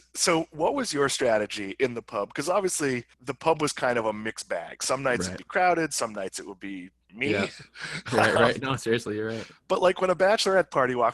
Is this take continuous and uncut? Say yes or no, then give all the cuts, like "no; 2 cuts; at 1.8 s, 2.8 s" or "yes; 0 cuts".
no; 1 cut; at 3.1 s